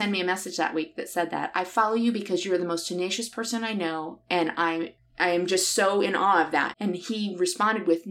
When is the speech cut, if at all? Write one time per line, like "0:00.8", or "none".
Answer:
0:05.0
0:06.7